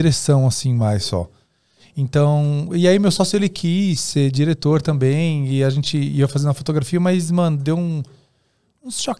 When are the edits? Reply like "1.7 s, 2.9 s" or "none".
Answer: none